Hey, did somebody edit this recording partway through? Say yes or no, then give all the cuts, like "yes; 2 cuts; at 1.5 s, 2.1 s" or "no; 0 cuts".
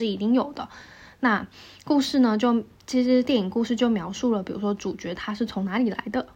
no; 0 cuts